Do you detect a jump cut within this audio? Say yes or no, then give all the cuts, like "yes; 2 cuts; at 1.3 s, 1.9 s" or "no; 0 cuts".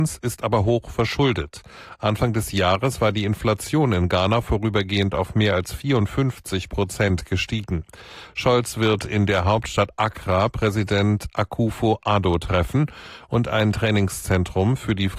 no; 0 cuts